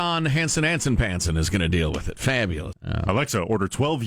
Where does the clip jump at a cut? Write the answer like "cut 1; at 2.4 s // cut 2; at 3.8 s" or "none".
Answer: cut 1; at 2.7 s